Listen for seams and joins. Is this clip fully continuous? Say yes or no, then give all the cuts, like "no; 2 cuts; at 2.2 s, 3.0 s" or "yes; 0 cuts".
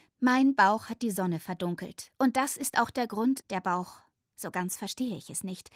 no; 1 cut; at 3.4 s